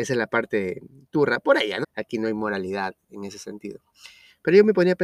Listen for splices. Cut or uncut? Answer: cut